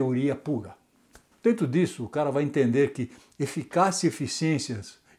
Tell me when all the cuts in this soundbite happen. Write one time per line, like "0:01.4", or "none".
0:01.3